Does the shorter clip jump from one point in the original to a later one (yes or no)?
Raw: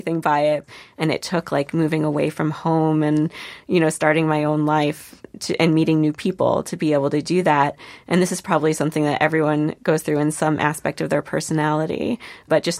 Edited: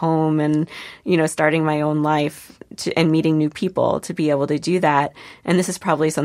no